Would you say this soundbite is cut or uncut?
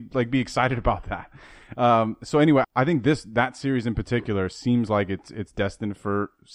cut